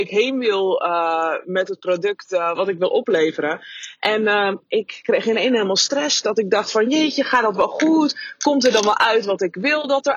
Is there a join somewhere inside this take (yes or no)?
no